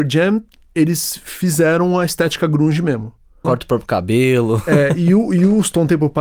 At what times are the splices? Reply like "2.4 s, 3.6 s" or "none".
3.4 s